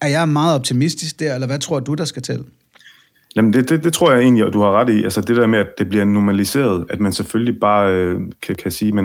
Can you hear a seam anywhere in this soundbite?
no; 0 cuts

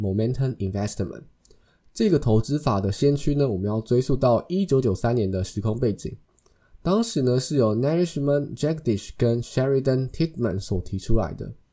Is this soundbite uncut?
yes; 0 cuts

